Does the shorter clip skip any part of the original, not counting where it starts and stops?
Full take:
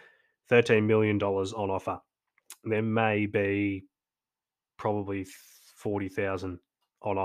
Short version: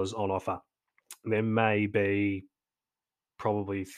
no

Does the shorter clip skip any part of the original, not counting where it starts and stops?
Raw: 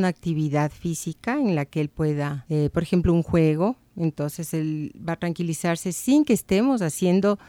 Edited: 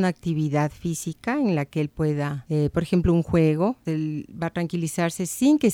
yes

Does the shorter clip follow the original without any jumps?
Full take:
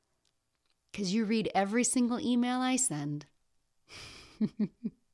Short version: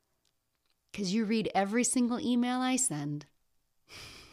yes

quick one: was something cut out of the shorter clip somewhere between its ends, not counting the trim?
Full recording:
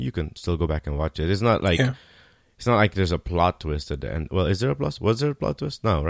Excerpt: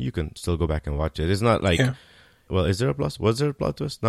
yes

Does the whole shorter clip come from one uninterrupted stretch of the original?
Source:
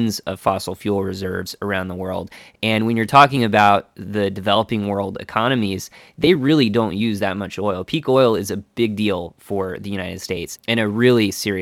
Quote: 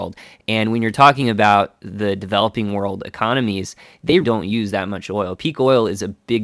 no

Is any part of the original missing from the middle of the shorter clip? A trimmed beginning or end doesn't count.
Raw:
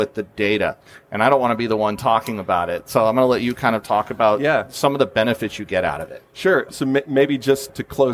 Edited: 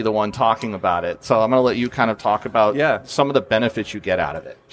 no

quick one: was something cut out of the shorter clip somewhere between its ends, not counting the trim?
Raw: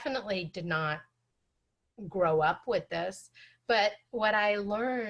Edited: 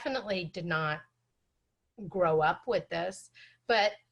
no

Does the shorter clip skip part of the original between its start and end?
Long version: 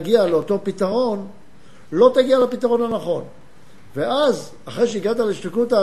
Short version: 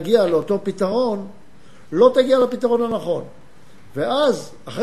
no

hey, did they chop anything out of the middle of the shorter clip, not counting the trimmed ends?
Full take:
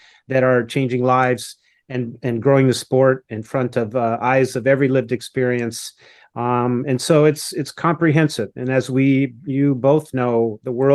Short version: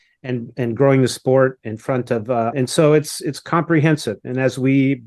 yes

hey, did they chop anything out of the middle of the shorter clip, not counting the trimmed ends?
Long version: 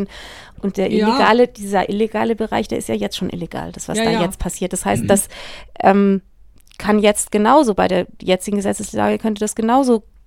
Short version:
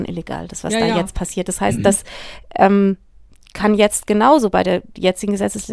no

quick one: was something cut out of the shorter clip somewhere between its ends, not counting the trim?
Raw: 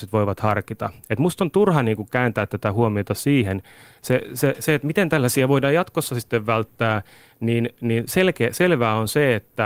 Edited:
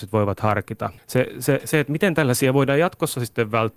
yes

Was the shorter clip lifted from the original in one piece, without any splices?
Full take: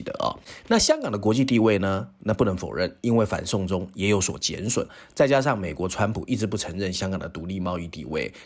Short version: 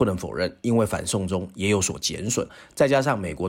yes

